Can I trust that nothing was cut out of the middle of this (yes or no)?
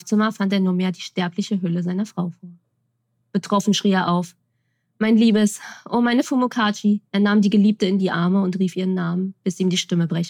no